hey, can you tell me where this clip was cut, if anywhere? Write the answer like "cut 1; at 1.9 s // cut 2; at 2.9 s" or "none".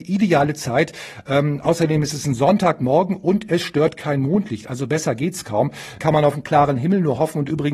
cut 1; at 6.0 s